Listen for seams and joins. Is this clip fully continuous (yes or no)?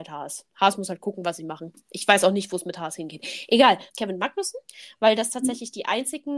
no